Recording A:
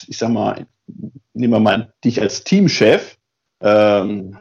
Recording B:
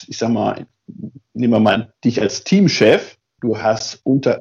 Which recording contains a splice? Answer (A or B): B